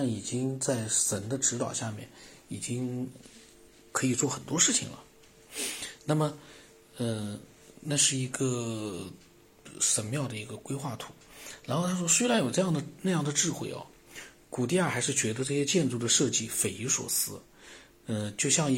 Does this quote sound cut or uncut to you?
uncut